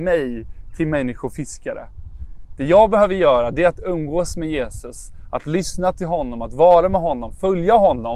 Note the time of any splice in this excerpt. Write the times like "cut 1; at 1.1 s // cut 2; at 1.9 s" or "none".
none

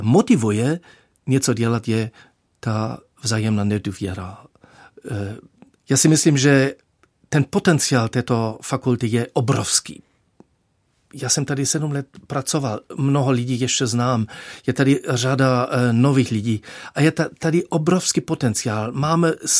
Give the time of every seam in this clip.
cut 1; at 5.7 s

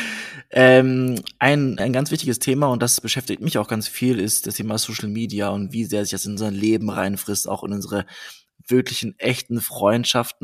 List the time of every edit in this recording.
cut 1; at 1.8 s

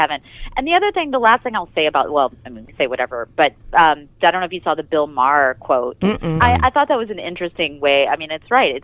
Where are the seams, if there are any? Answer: cut 1; at 6.4 s

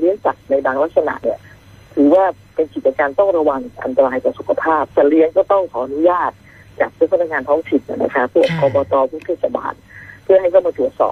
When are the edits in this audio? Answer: cut 1; at 4.9 s

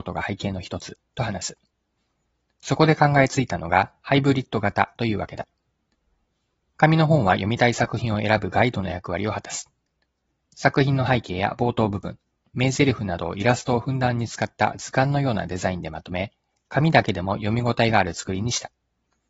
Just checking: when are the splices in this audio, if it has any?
none

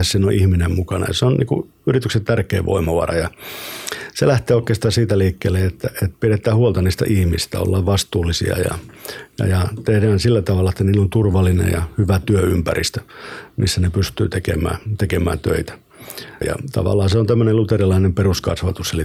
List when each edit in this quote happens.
cut 1; at 16.4 s

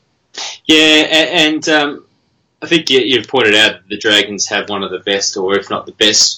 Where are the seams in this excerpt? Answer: none

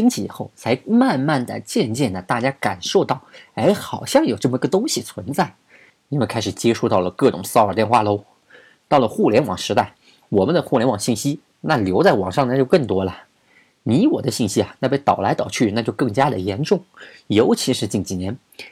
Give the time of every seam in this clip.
none

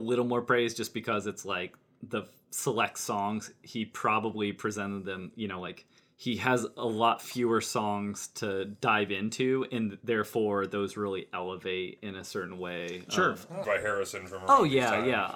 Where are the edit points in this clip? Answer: cut 1; at 13.6 s

